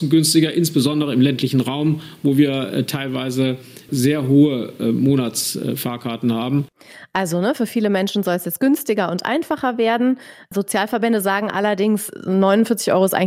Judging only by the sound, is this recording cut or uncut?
uncut